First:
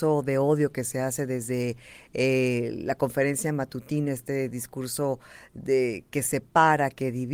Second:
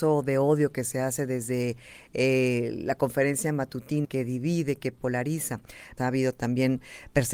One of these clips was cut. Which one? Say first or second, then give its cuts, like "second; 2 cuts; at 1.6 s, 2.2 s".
second; 2 cuts; at 4.0 s, 6.0 s